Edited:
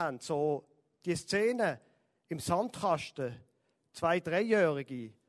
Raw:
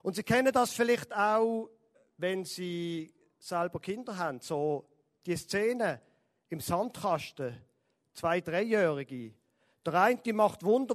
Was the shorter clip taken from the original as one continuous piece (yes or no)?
yes